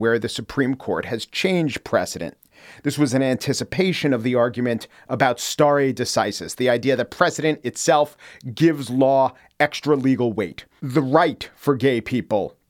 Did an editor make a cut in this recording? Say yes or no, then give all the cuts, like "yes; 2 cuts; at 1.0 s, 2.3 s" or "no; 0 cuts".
yes; 1 cut; at 10.8 s